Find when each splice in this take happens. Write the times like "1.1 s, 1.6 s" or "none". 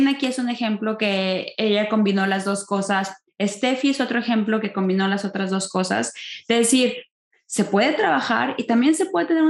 none